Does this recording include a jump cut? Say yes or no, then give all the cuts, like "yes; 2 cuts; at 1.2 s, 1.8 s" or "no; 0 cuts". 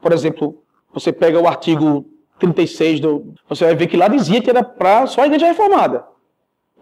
yes; 2 cuts; at 3.4 s, 4.4 s